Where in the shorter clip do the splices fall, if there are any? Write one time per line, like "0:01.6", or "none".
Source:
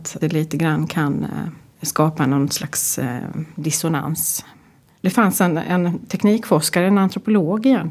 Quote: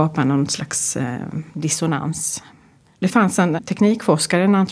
0:03.6